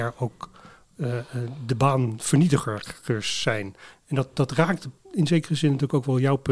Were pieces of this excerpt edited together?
yes; 1 cut; at 5.0 s

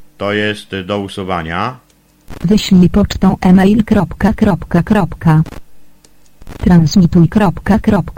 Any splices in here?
no; 0 cuts

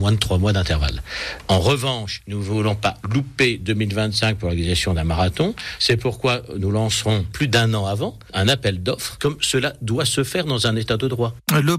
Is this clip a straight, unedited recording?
yes; 0 cuts

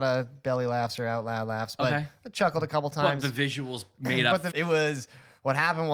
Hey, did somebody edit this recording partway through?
yes; 1 cut; at 4.5 s

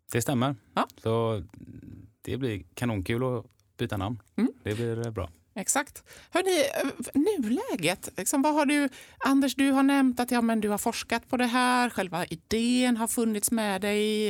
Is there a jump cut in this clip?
no; 0 cuts

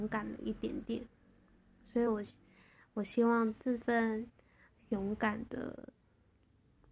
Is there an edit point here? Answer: no; 0 cuts

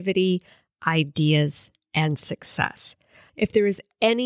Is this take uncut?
no; 1 cut; at 3.3 s

